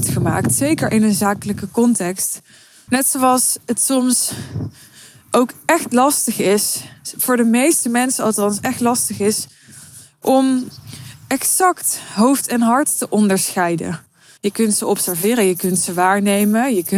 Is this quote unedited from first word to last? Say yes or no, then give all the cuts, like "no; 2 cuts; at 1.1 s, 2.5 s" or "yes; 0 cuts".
no; 2 cuts; at 2.9 s, 14.4 s